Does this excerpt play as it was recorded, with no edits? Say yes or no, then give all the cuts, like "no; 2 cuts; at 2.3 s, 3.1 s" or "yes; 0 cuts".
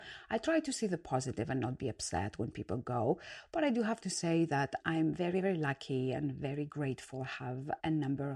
yes; 0 cuts